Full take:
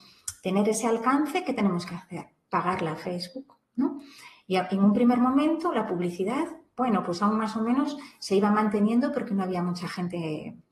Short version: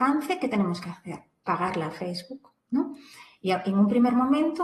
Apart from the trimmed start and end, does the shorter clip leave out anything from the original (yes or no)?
no